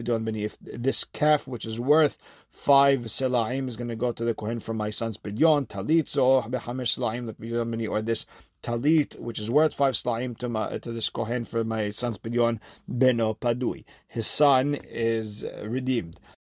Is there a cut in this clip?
no; 0 cuts

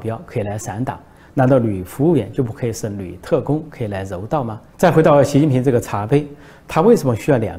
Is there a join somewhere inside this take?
yes; 1 cut; at 4.7 s

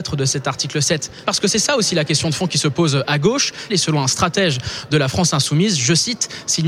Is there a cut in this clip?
yes; 2 cuts; at 1.2 s, 3.7 s

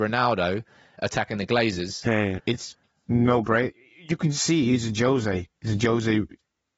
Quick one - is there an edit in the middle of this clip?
yes; 1 cut; at 2.4 s

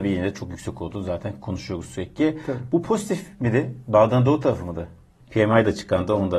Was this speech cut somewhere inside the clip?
yes; 1 cut; at 5.2 s

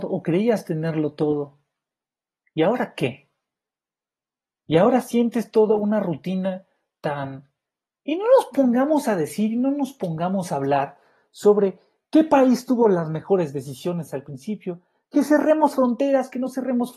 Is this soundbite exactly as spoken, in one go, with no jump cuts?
no; 1 cut; at 7.9 s

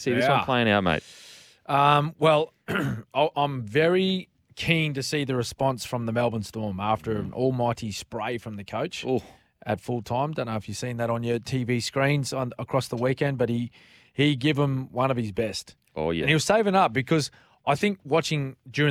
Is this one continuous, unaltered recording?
yes; 0 cuts

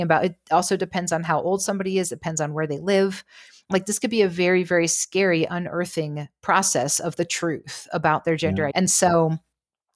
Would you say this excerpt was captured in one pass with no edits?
no; 1 cut; at 8.7 s

